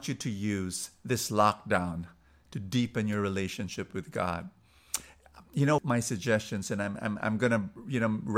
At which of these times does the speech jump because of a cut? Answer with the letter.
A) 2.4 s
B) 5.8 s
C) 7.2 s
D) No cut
B